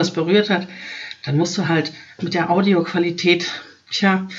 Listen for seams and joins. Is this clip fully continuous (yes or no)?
yes